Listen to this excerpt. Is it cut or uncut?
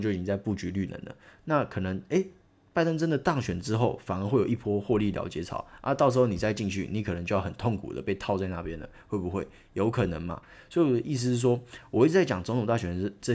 uncut